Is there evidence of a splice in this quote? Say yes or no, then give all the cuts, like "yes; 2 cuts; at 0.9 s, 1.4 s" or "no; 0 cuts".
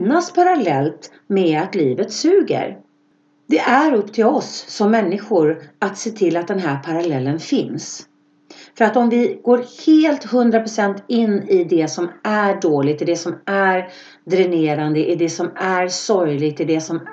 no; 0 cuts